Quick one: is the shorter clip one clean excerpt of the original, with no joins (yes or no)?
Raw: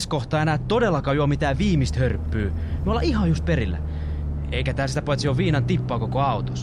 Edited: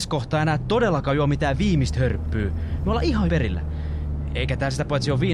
no